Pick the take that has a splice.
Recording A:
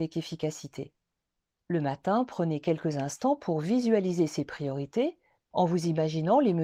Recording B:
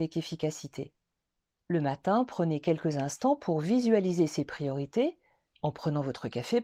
A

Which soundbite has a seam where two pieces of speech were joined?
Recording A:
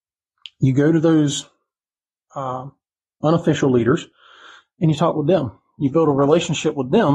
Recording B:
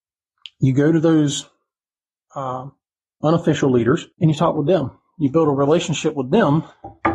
B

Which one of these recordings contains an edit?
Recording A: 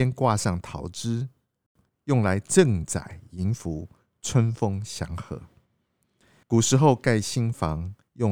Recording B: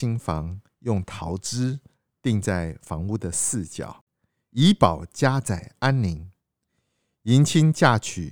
A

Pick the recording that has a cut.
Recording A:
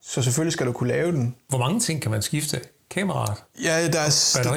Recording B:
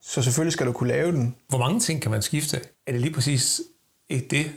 B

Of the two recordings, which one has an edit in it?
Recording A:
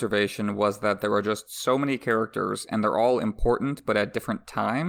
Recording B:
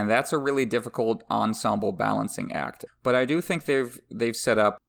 B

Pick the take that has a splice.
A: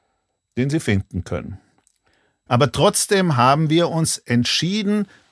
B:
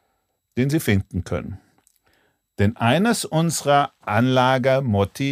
A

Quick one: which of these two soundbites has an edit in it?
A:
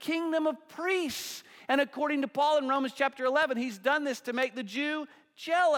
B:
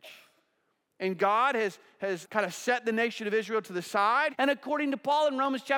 B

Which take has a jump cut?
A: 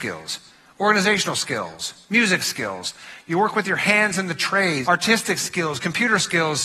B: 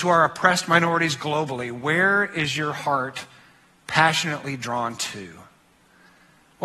A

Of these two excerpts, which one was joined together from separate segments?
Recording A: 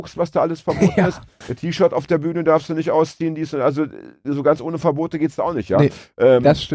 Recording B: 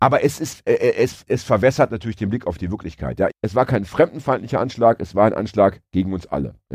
B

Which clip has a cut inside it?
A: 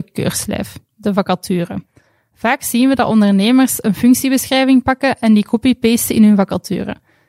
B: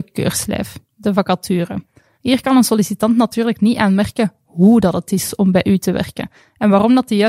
B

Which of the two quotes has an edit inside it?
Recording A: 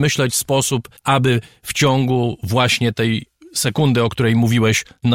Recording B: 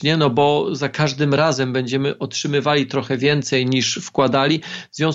A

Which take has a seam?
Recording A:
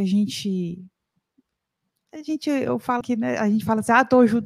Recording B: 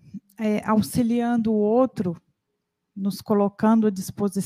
A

